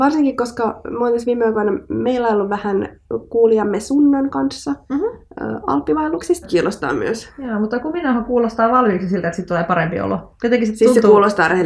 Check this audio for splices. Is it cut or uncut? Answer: cut